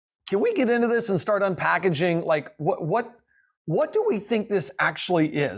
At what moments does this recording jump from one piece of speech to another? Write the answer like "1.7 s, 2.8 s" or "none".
none